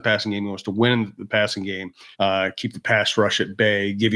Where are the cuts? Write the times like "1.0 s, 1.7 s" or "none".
2.1 s

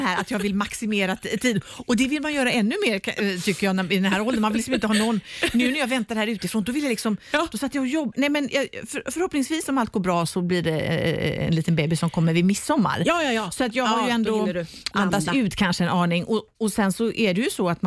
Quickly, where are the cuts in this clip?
8.1 s, 14.9 s

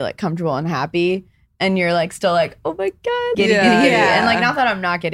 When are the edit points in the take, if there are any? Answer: 3.3 s

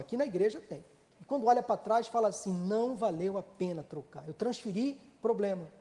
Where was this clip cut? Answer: 1.1 s

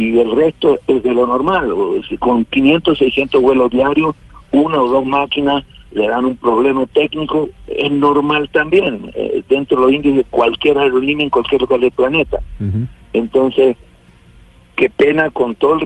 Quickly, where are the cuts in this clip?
none

